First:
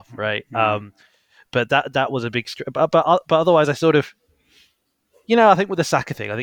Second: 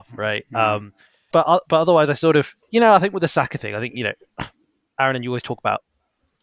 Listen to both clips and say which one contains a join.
second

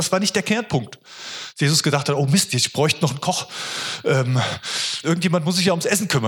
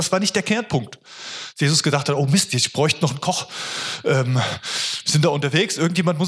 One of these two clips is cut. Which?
first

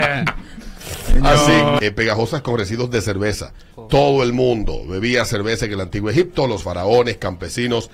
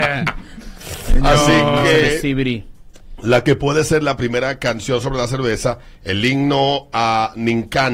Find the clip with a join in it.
first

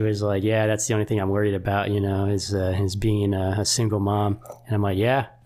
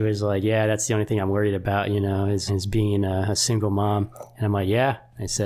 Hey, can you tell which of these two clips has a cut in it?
second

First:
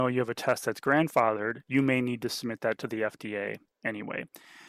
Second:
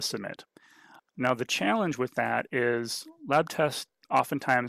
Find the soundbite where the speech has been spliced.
first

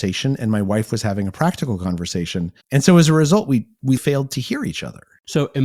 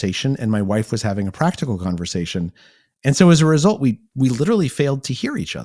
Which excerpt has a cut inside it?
first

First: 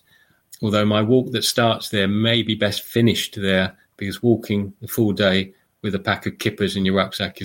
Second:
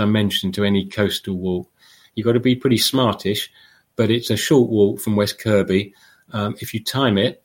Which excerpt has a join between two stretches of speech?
second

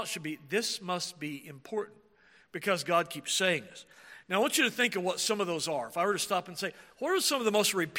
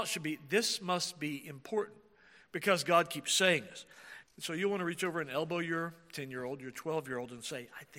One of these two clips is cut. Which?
second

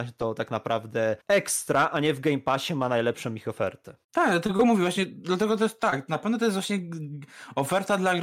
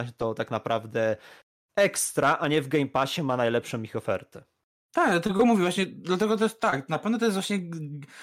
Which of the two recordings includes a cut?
first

